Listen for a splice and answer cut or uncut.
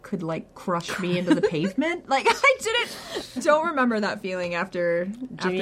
cut